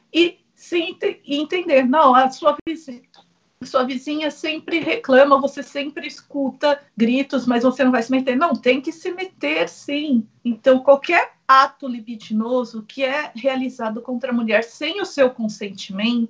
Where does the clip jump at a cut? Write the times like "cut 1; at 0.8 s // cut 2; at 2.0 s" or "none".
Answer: cut 1; at 6.9 s // cut 2; at 10.4 s

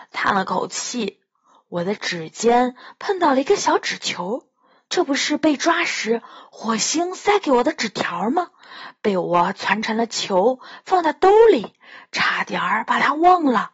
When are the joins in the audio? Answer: cut 1; at 4.9 s

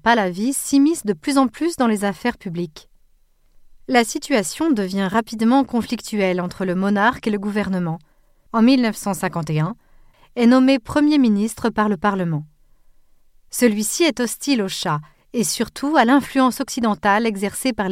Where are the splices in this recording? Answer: cut 1; at 8.5 s // cut 2; at 10.1 s

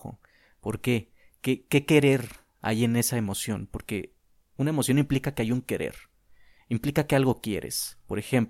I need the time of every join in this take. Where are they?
none

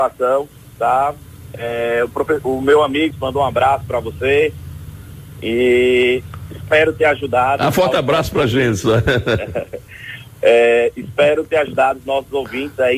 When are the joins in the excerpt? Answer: cut 1; at 3.1 s

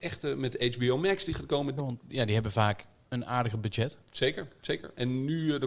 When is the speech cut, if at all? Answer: cut 1; at 1.8 s

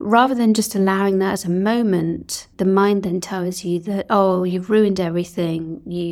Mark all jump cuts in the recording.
cut 1; at 2.5 s

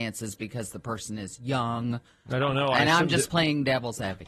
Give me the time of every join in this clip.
none

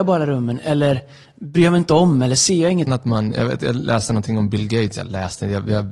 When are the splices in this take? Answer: cut 1; at 2.9 s

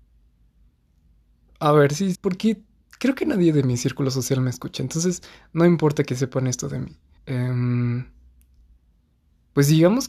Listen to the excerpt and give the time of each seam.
cut 1; at 2.1 s // cut 2; at 7.2 s

